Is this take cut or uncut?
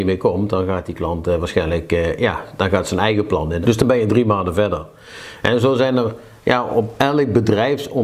cut